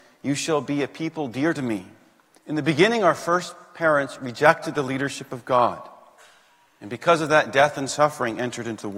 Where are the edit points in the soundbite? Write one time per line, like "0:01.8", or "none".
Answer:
0:02.4